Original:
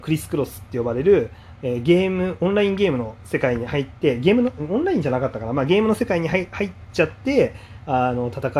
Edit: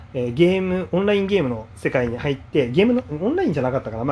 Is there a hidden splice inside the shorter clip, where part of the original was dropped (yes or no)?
no